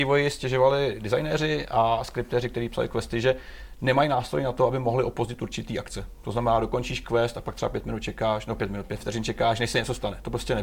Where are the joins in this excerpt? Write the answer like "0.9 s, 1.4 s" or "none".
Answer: none